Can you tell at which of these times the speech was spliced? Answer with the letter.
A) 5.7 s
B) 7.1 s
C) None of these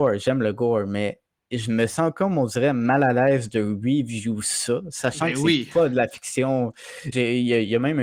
B